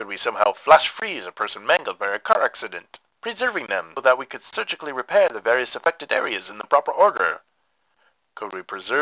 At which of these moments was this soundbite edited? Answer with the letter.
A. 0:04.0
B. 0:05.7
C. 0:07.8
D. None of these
A